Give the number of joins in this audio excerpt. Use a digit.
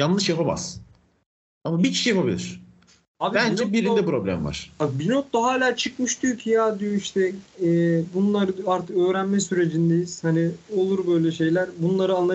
0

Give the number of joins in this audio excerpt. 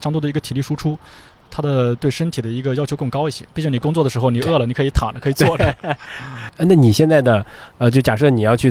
0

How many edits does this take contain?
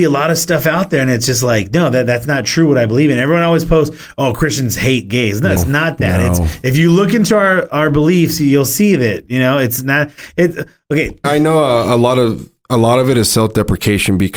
2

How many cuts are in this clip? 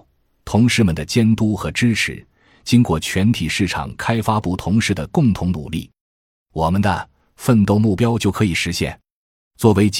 0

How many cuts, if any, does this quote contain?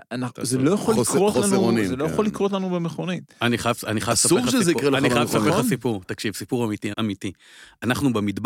1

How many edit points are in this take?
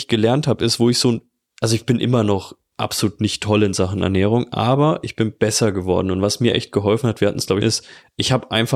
1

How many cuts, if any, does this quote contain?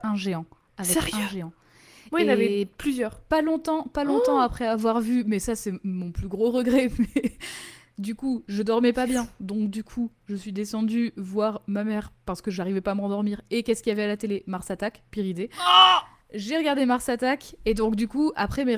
0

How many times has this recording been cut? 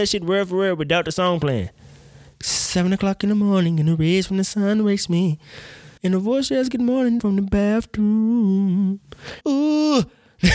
3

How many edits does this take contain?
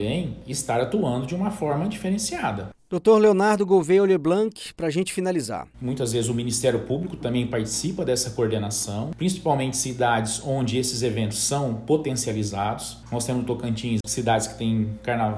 2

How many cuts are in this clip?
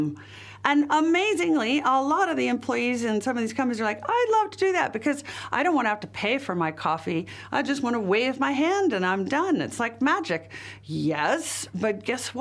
0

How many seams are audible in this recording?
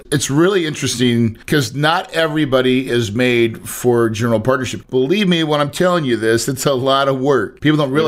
0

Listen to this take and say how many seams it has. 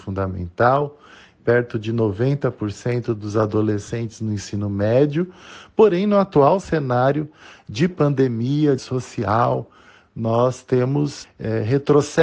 2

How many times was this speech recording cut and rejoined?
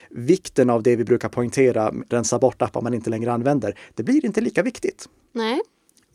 1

